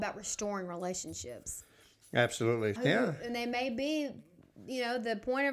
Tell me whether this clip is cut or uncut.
cut